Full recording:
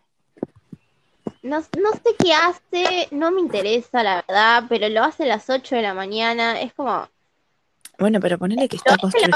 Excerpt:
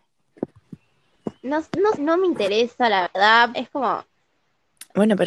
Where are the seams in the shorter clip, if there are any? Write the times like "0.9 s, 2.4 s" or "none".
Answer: 1.9 s, 3.5 s